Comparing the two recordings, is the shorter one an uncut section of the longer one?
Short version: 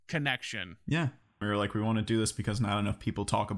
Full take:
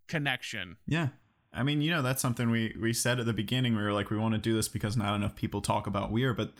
no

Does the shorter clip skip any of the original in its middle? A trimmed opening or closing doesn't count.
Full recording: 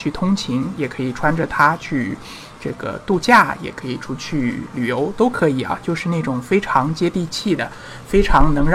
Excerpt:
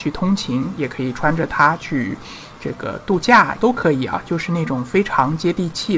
yes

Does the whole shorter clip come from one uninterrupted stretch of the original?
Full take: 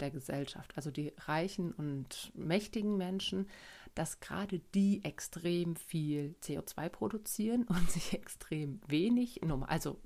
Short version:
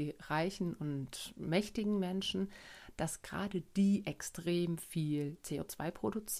yes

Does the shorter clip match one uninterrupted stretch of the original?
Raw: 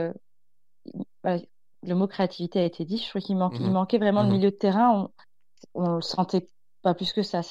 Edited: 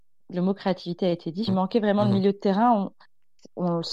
no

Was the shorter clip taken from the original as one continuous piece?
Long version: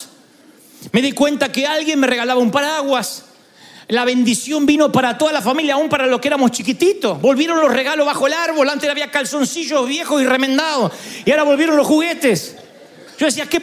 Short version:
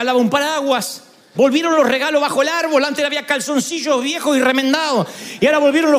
no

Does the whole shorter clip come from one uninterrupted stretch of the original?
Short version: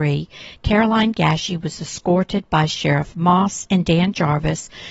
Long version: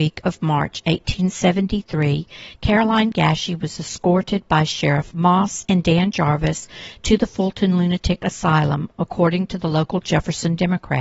yes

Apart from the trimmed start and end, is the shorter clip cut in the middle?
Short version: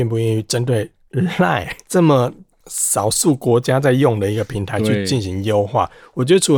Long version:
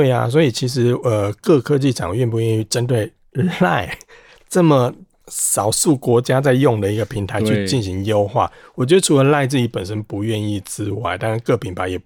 yes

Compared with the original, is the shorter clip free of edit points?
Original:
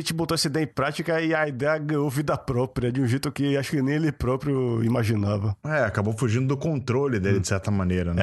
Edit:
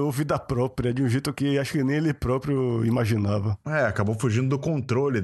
yes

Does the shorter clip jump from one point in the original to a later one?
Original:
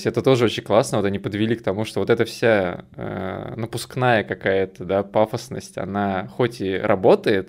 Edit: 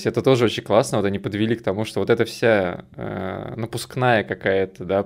no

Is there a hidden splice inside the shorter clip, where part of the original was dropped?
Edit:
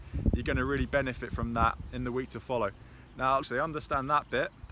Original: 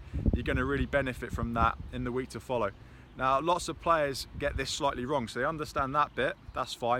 yes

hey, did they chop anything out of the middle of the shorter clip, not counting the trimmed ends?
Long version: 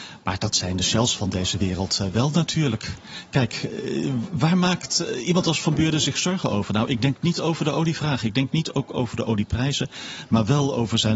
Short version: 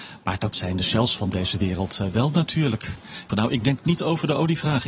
yes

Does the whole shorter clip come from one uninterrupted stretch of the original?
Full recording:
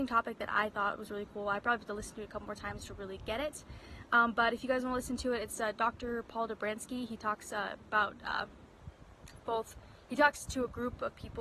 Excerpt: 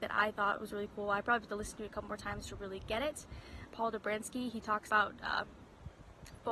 no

